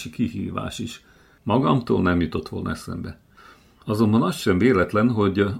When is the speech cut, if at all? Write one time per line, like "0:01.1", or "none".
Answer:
0:01.4